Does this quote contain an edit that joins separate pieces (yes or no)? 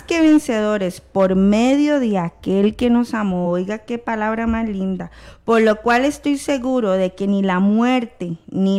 no